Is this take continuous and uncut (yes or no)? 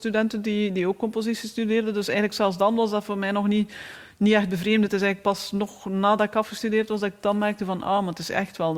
yes